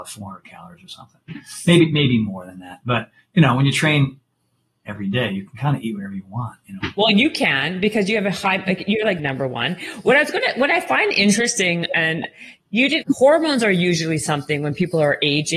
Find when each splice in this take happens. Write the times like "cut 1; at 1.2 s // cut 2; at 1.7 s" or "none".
cut 1; at 9.2 s // cut 2; at 13.0 s